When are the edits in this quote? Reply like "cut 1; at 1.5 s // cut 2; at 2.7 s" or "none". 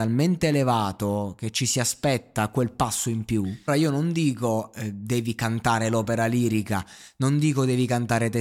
cut 1; at 3.7 s